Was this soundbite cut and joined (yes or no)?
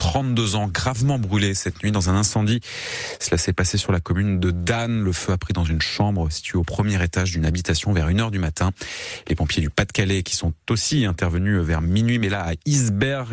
no